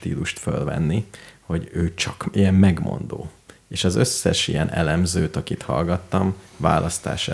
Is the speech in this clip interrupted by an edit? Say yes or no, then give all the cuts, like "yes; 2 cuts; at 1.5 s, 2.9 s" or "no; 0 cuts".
no; 0 cuts